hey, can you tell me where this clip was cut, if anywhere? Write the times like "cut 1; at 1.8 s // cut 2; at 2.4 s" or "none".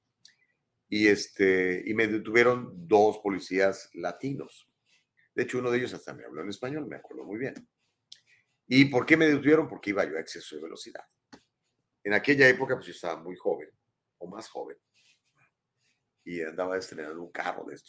none